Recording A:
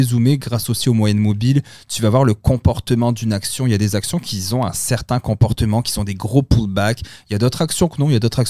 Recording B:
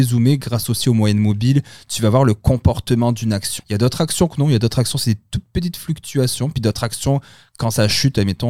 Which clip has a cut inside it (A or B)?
B